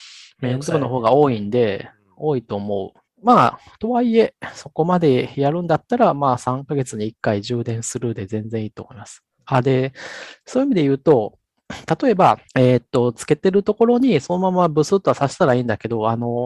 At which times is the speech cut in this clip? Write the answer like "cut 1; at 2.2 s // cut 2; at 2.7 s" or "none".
cut 1; at 3.1 s // cut 2; at 12.5 s